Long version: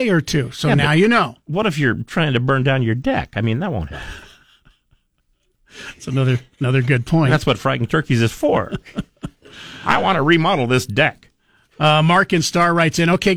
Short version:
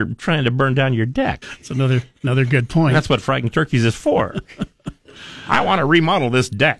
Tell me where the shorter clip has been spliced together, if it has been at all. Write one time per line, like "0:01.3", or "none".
0:01.4